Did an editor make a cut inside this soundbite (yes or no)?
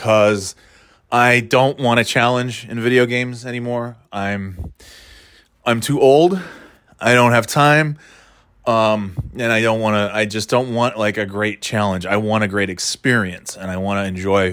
no